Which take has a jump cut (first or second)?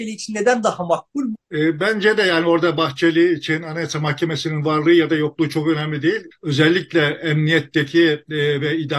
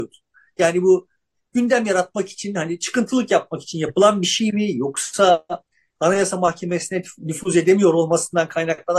first